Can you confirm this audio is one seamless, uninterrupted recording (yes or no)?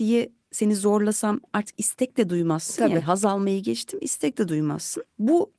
yes